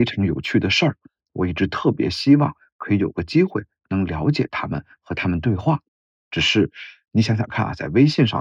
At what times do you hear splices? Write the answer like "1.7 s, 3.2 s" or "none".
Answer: none